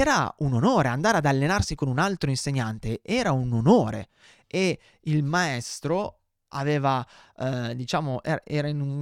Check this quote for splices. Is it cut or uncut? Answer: uncut